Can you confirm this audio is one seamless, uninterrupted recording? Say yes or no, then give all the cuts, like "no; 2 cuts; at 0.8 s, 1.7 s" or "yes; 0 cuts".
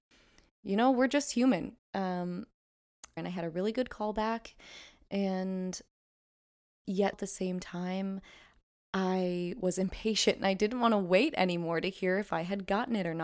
no; 3 cuts; at 1.8 s, 3.2 s, 7.1 s